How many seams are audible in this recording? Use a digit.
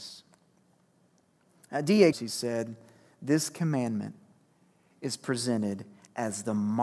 1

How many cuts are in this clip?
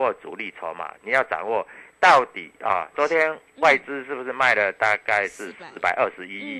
2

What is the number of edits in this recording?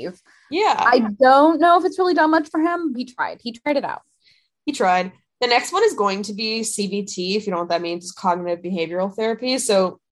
1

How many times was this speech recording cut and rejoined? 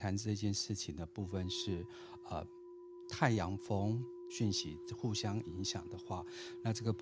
1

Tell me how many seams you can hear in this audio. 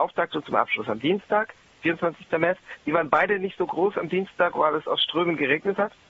1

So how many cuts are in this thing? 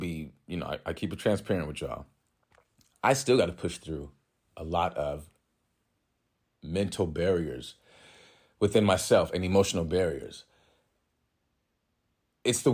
0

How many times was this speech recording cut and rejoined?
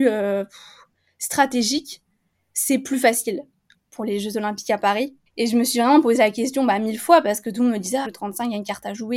3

